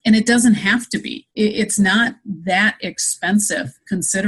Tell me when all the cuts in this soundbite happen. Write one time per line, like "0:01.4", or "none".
0:01.3